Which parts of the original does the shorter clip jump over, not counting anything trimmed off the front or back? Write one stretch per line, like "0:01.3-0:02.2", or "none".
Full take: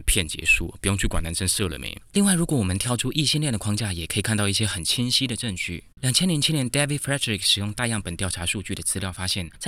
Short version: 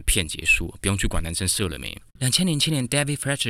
0:02.1-0:05.9